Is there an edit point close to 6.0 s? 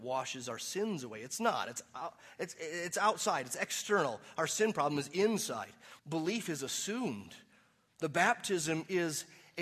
yes; 1 cut; at 6.0 s

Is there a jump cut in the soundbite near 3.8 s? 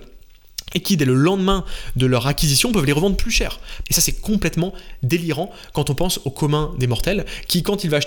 yes; 1 cut; at 3.8 s

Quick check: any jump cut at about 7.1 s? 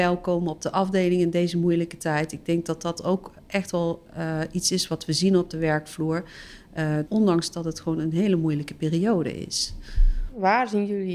yes; 1 cut; at 7.1 s

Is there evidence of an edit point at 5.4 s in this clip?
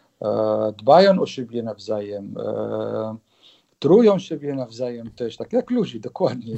no; 0 cuts

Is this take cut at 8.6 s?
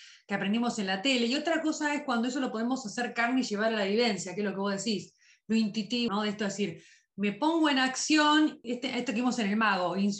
yes; 2 cuts; at 6.1 s, 8.6 s

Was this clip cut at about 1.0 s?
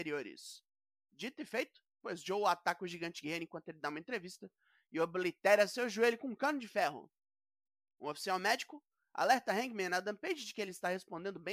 no; 0 cuts

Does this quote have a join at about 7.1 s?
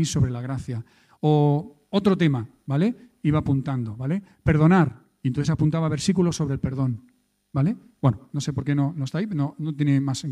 no; 0 cuts

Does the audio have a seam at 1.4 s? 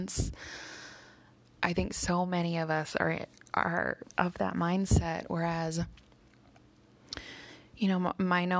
yes; 1 cut; at 1.4 s

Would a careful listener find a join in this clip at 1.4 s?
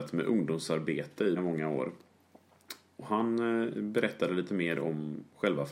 yes; 1 cut; at 1.4 s

